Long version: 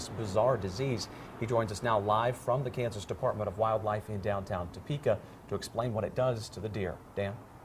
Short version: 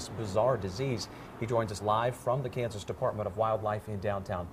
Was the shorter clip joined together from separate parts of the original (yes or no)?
yes